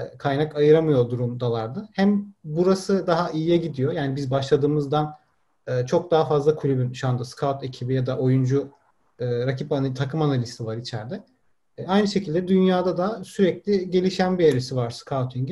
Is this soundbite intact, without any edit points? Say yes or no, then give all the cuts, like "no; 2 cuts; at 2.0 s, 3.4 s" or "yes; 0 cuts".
yes; 0 cuts